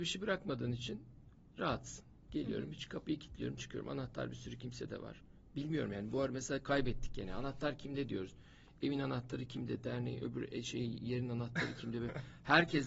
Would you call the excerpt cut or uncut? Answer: uncut